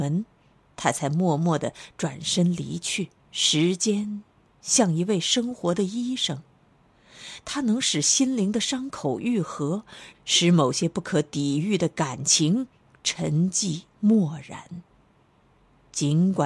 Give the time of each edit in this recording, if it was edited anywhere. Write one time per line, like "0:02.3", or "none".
0:03.2
0:10.1
0:13.9